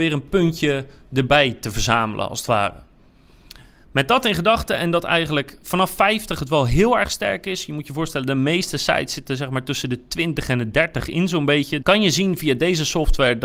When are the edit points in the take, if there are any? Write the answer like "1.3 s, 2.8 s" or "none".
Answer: 11.8 s